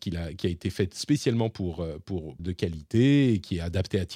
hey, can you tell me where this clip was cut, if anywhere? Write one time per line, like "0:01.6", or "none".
0:02.4